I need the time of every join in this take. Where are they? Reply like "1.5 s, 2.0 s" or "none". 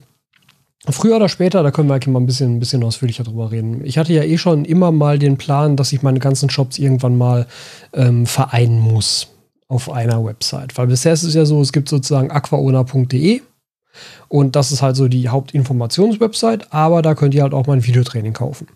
none